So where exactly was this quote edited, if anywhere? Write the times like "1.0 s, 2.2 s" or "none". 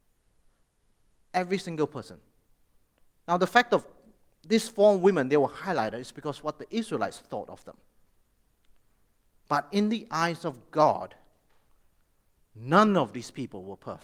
none